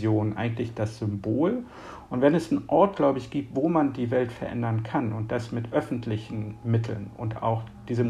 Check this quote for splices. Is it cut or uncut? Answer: cut